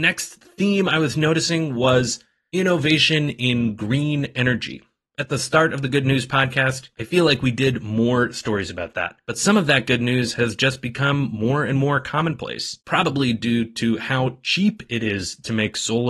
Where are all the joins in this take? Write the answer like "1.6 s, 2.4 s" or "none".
12.8 s